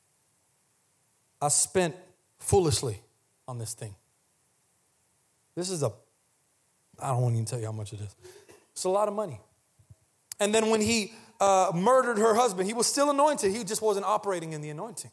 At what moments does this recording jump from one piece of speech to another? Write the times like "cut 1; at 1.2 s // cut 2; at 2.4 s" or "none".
cut 1; at 10.3 s